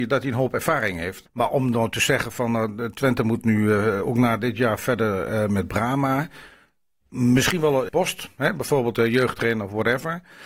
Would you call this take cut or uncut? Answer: cut